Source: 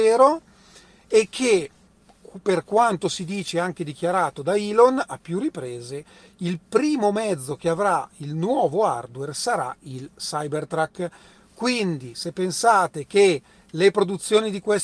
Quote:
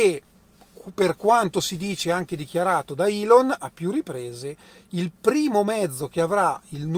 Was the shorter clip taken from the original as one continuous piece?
yes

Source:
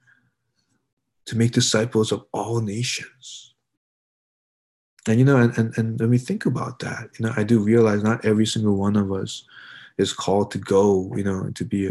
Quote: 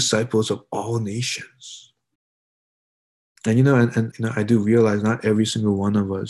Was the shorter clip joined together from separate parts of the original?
yes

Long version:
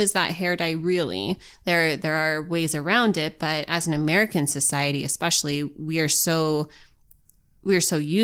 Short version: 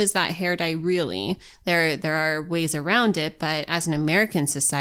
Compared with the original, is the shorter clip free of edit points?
yes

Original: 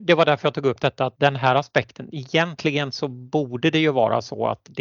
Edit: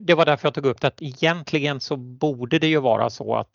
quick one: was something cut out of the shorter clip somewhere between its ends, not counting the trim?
yes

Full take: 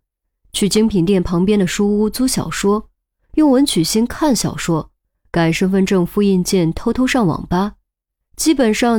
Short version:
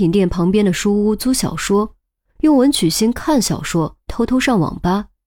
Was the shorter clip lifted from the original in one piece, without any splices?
no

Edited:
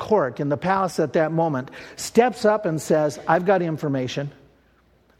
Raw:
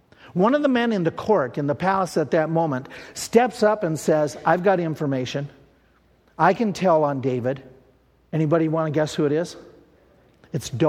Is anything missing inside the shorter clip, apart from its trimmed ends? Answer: no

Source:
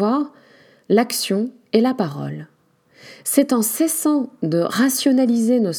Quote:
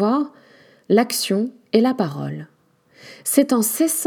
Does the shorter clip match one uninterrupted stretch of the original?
yes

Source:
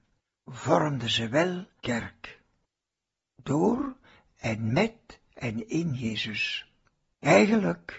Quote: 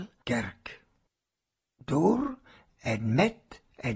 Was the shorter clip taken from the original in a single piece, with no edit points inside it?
yes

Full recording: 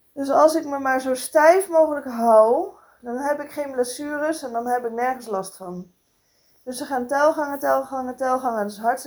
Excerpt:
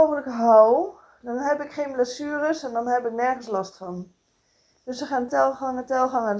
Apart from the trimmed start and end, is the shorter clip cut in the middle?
yes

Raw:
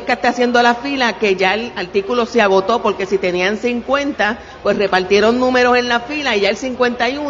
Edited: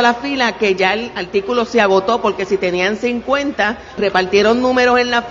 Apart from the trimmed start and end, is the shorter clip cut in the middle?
yes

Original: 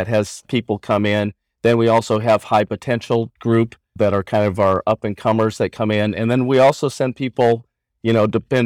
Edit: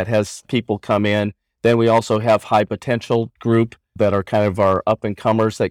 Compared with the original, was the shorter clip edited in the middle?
no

